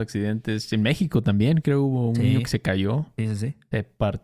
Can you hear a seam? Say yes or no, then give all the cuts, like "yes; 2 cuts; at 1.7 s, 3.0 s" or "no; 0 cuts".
no; 0 cuts